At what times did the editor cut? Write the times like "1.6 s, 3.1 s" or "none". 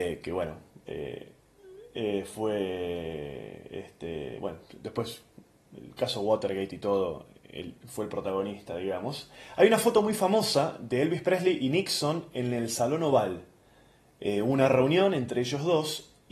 none